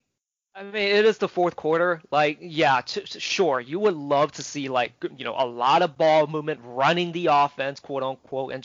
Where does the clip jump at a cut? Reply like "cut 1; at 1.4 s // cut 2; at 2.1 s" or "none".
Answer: none